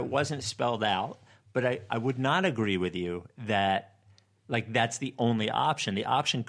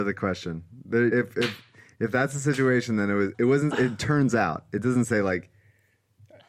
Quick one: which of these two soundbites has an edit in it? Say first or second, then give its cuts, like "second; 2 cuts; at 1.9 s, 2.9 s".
second; 2 cuts; at 1.1 s, 3.3 s